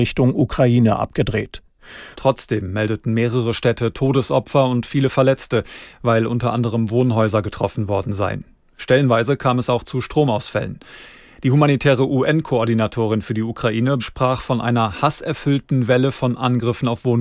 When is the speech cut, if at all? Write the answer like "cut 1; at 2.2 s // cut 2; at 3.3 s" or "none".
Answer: cut 1; at 2.1 s // cut 2; at 14.0 s